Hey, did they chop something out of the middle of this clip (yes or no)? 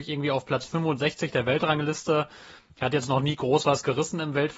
no